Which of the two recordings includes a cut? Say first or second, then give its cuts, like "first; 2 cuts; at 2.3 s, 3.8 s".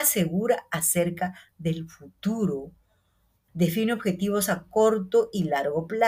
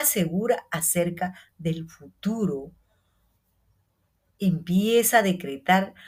first; 1 cut; at 3.5 s